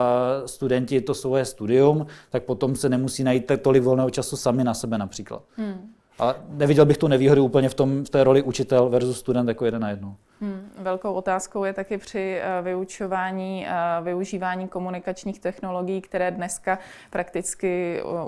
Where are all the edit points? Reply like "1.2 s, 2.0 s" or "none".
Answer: none

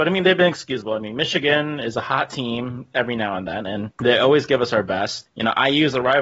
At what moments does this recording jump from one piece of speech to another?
none

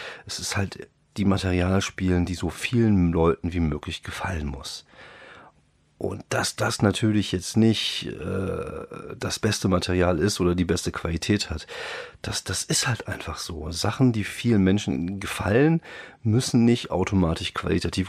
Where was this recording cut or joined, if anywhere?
1.0 s

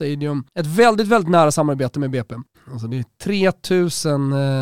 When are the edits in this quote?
2.5 s

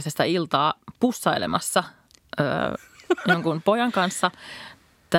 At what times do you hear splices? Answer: none

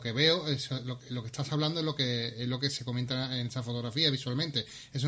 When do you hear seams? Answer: none

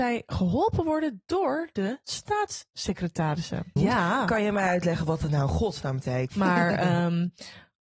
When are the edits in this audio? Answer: 3.8 s, 6.3 s

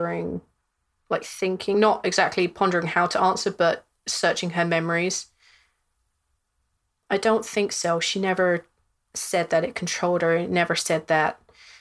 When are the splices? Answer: none

